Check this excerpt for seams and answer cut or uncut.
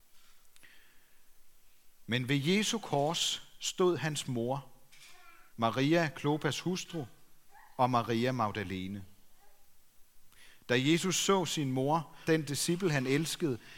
cut